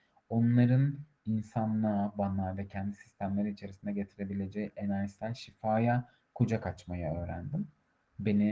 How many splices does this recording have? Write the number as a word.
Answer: zero